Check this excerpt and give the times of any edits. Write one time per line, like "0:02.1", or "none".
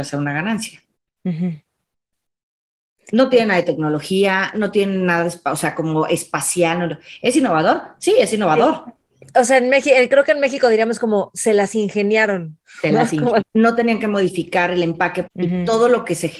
0:13.4
0:15.3

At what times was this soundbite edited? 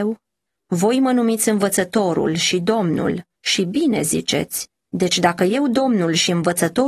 0:04.7

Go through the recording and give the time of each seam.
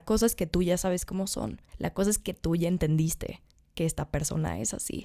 0:01.7

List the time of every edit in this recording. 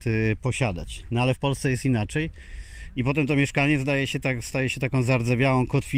none

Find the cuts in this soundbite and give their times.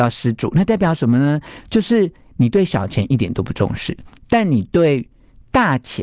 none

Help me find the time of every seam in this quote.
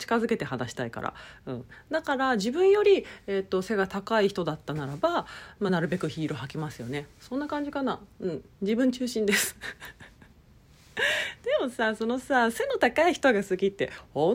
none

